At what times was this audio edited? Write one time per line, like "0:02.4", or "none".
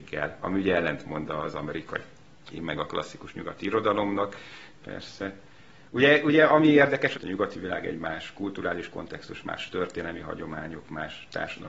0:04.7
0:07.1